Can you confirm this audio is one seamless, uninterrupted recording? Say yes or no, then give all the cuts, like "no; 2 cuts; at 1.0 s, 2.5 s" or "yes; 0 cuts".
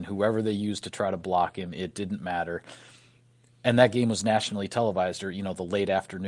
yes; 0 cuts